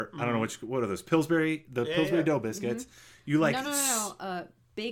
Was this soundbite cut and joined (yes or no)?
no